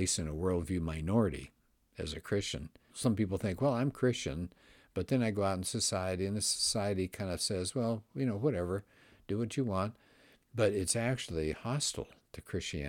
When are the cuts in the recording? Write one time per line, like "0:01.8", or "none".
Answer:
0:02.9